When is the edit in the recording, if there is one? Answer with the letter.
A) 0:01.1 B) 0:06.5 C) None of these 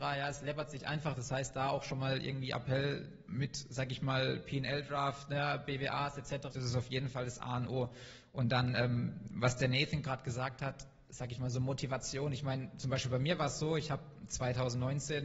B